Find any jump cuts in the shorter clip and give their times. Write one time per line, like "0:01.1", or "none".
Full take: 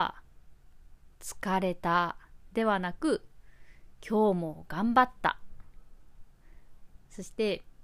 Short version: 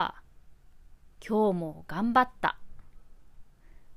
0:01.2